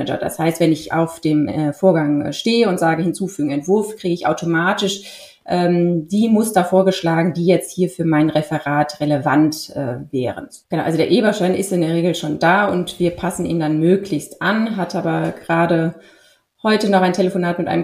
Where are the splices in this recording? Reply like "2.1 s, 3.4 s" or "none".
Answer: 10.6 s